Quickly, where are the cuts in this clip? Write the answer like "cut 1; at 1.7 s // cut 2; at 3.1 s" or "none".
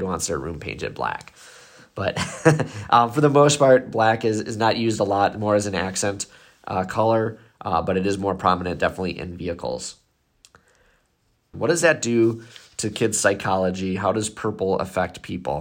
cut 1; at 11.5 s